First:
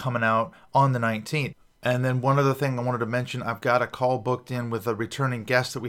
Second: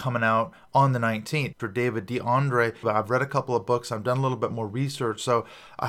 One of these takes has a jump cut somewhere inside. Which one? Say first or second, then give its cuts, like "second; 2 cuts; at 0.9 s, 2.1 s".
second; 2 cuts; at 1.6 s, 2.8 s